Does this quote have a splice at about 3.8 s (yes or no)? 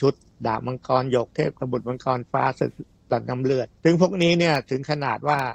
yes